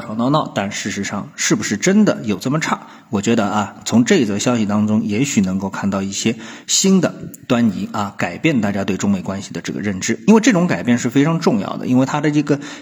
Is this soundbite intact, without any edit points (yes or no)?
yes